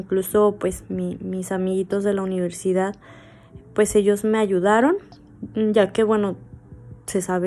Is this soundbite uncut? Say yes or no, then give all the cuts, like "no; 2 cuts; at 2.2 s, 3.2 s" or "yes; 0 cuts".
yes; 0 cuts